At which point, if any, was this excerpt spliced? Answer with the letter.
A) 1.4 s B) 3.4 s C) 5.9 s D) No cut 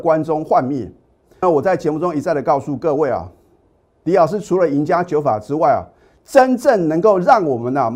A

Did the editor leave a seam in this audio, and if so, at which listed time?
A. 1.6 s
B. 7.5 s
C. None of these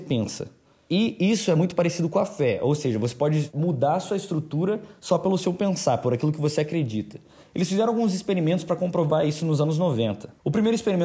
C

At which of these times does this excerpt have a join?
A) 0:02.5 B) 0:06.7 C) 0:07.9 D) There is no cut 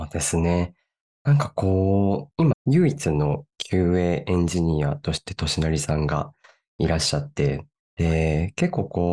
A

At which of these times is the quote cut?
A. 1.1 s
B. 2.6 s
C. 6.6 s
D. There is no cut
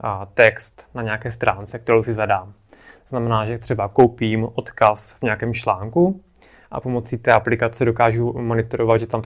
D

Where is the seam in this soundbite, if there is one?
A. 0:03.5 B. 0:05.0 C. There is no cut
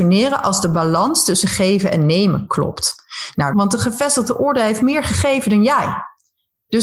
A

